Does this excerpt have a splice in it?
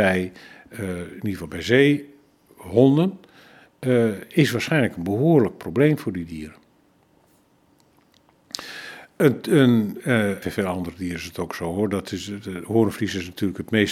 yes; 1 cut; at 10.4 s

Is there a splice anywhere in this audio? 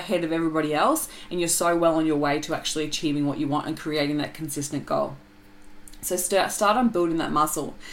no; 0 cuts

